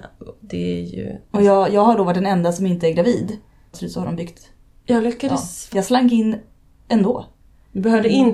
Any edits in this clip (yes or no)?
yes